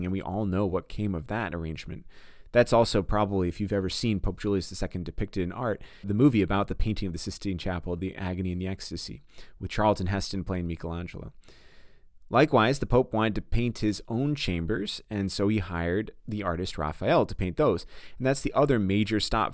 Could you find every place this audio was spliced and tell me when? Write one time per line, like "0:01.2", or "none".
0:06.0